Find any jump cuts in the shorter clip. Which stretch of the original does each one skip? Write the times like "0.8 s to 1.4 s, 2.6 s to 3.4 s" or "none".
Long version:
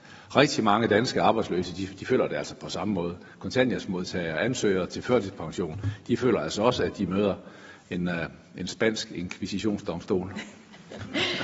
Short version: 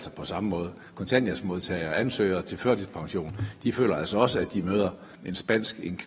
7.6 s to 8.5 s